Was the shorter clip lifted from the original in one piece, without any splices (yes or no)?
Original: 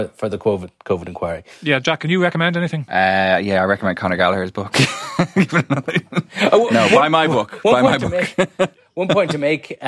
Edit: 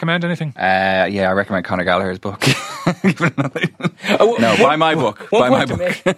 yes